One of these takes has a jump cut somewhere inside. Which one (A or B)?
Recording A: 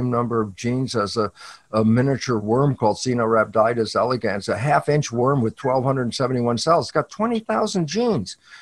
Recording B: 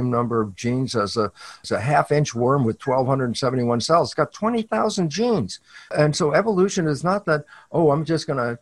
B